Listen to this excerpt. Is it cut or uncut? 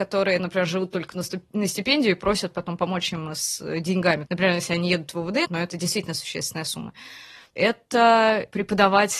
cut